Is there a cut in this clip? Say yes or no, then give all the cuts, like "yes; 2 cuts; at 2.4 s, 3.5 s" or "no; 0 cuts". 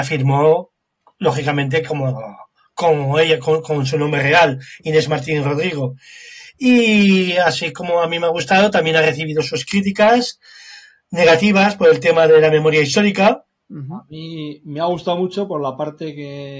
yes; 1 cut; at 13.6 s